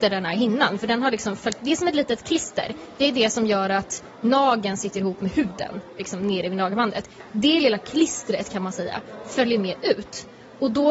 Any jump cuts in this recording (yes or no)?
no